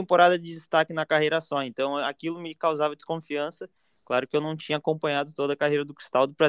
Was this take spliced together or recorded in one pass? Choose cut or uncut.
uncut